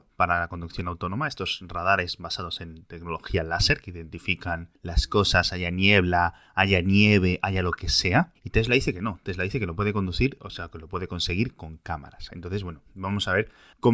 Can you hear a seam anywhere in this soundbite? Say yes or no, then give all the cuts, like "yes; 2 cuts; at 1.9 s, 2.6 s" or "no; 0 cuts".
no; 0 cuts